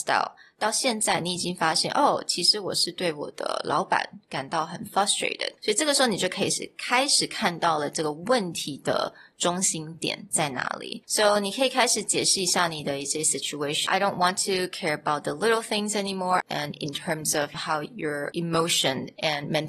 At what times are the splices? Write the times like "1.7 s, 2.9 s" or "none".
16.4 s